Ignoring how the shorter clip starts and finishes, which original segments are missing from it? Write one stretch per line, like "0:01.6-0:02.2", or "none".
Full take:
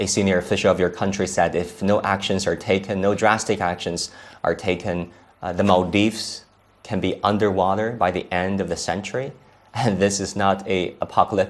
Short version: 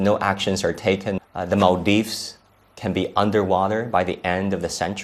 0:03.0-0:05.3